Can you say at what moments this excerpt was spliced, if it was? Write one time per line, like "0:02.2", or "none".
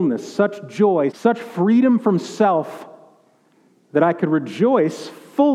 0:01.1